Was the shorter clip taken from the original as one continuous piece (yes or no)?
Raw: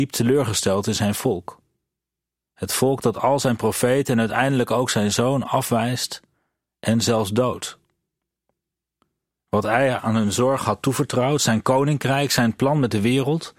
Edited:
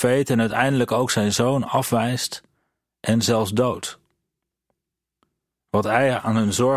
yes